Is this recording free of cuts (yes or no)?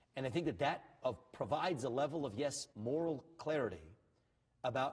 no